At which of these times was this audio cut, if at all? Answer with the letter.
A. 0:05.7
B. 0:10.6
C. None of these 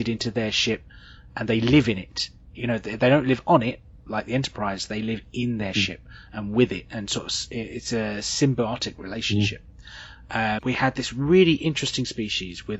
B